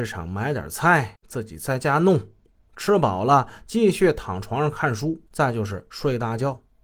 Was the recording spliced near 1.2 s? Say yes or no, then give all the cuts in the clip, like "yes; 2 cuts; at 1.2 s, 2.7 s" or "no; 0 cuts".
no; 2 cuts; at 2.6 s, 5.3 s